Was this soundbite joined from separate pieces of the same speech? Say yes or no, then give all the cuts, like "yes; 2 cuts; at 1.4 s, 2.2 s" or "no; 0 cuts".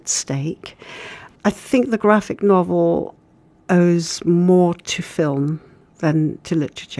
no; 0 cuts